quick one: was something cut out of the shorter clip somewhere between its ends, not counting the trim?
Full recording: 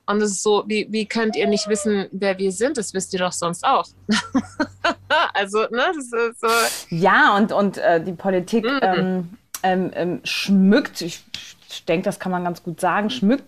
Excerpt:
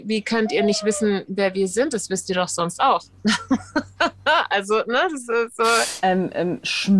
yes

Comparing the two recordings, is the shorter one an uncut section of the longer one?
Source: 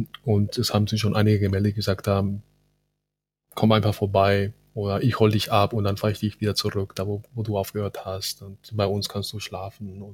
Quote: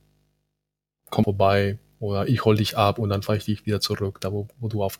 no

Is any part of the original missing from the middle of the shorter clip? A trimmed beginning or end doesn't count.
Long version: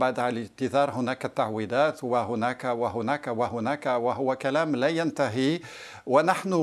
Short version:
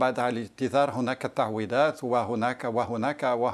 yes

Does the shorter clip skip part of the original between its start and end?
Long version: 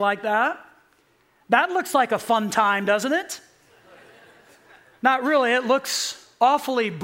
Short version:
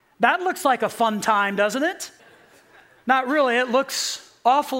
yes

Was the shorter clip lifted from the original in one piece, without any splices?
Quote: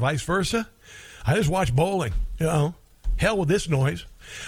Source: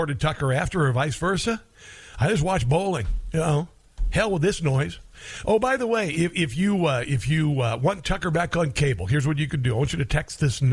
yes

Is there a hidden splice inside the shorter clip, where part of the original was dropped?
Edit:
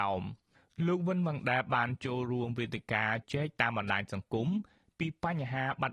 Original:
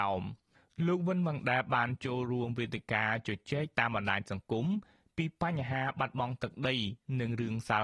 yes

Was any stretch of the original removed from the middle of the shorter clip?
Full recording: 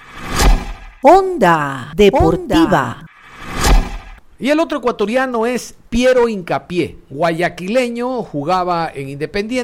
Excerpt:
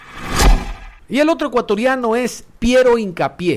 yes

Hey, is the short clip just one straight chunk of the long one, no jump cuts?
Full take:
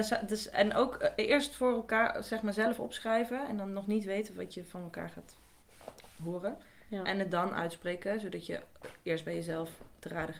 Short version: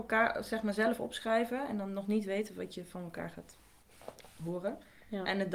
yes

